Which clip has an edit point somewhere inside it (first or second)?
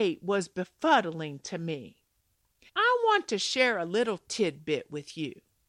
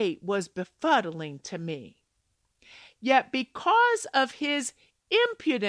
first